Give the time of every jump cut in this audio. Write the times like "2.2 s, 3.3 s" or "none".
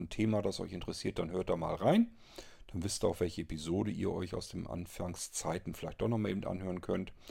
none